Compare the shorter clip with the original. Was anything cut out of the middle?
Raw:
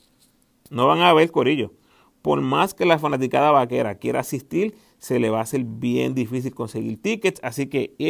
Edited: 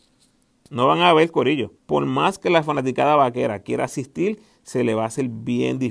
yes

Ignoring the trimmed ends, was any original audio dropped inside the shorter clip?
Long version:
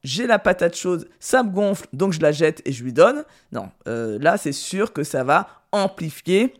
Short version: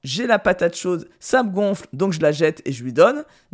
no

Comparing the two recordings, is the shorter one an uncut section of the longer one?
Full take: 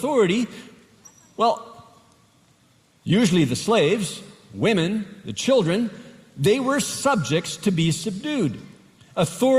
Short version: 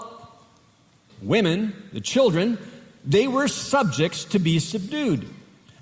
no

